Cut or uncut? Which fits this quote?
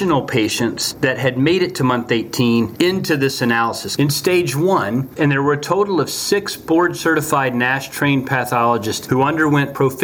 cut